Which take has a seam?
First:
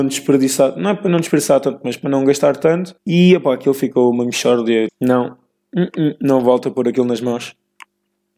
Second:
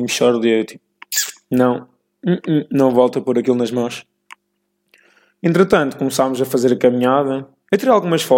first; 2 cuts; at 3.0 s, 4.9 s

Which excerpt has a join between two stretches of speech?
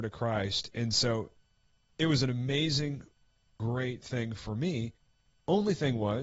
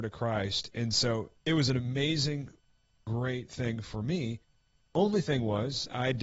second; 1 cut; at 1.4 s

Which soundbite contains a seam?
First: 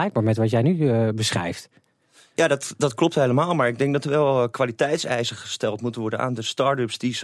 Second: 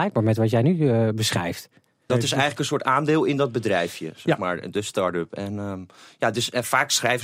second; 1 cut; at 2.1 s

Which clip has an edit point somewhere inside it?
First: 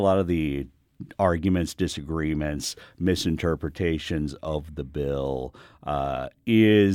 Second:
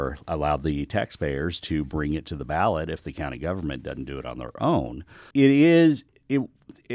second; 1 cut; at 5.3 s

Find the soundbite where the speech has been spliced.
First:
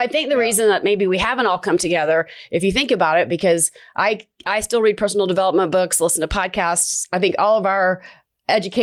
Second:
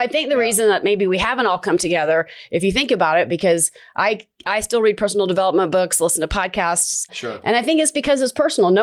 second; 1 cut; at 7.1 s

